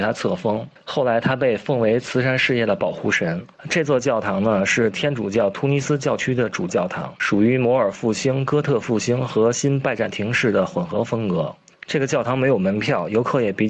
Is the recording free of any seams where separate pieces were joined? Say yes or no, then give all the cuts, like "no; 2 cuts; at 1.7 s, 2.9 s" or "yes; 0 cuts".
no; 1 cut; at 6.7 s